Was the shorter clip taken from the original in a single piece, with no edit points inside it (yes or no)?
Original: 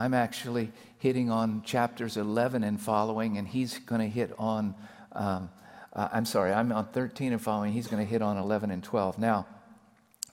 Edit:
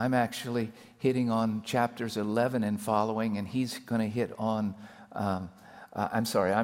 yes